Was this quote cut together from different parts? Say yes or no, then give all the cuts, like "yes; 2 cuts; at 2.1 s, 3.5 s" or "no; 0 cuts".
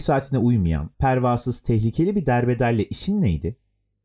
yes; 1 cut; at 0.9 s